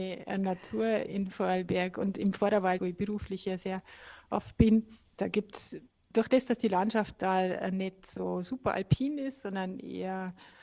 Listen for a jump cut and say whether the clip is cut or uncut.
cut